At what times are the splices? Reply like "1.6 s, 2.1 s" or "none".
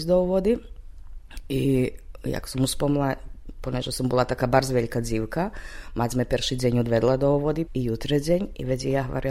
7.7 s